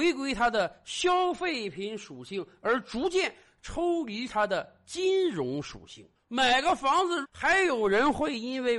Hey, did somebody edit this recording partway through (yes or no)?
yes